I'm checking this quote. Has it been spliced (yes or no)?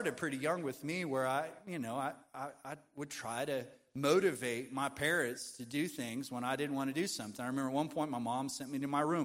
no